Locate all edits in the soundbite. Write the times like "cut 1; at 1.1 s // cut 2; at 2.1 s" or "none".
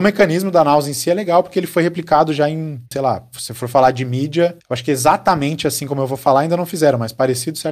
cut 1; at 2.9 s

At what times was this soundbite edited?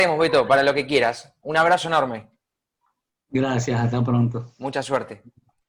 none

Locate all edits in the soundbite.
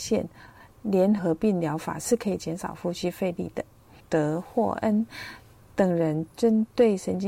cut 1; at 1.2 s // cut 2; at 4.0 s

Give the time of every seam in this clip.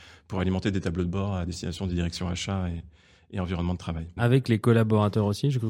cut 1; at 4.2 s

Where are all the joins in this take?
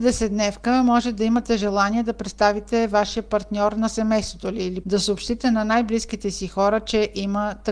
cut 1; at 4.8 s

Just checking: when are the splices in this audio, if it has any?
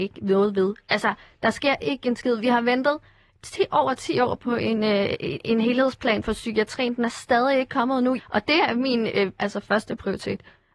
cut 1; at 8.2 s // cut 2; at 9.4 s

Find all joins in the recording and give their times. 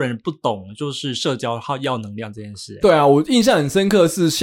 cut 1; at 2.8 s

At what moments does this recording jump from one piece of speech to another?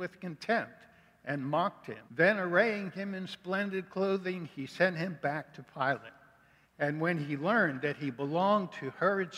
cut 1; at 2.1 s // cut 2; at 6.6 s

